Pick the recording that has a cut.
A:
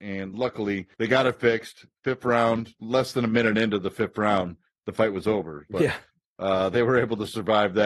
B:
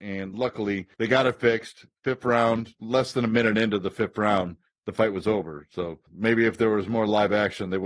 A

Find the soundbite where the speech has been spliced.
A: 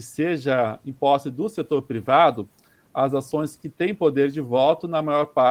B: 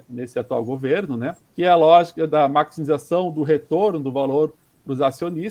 B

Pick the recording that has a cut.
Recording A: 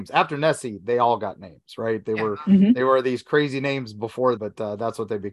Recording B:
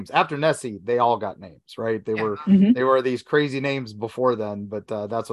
A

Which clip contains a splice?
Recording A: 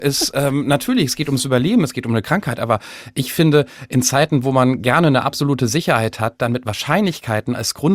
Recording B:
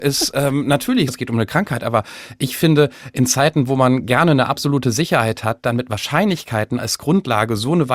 B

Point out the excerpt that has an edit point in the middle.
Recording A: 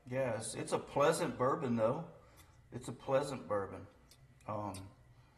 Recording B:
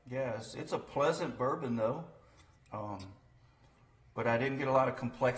B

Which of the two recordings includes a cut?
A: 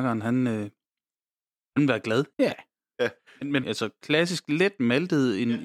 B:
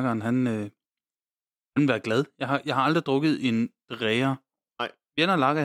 A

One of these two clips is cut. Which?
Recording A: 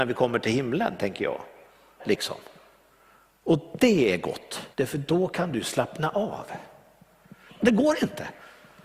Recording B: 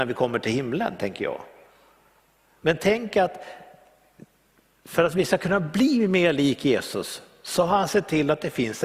A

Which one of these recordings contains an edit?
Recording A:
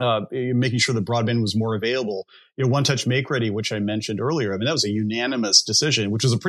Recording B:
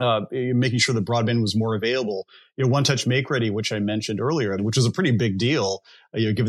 B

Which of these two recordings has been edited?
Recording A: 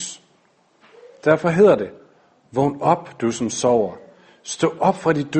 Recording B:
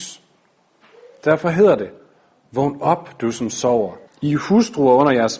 B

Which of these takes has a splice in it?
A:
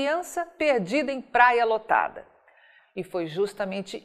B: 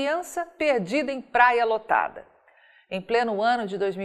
A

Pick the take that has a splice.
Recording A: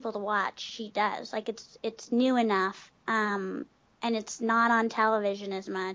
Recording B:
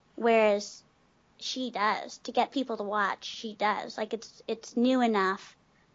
A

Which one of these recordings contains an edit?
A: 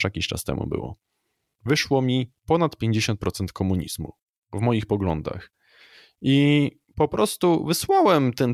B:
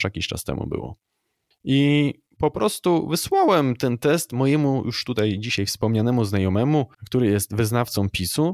B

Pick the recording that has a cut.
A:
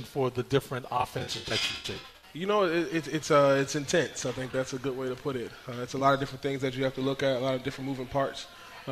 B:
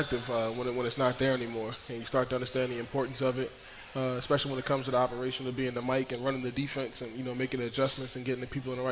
B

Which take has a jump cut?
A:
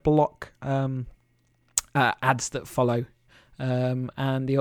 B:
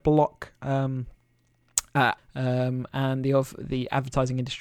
B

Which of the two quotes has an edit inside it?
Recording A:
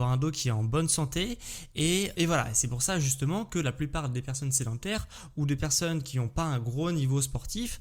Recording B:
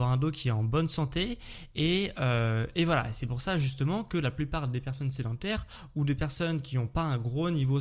A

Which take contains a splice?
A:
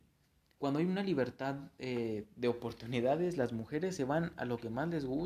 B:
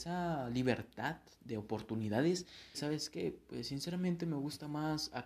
B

